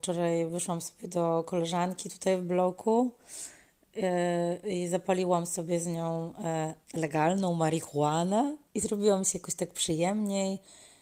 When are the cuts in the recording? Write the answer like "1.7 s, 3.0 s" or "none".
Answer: 6.8 s, 8.7 s